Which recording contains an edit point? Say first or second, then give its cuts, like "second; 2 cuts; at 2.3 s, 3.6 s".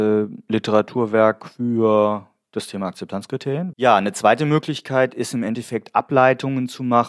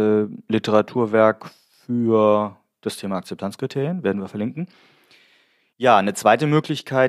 first; 2 cuts; at 1.5 s, 3.7 s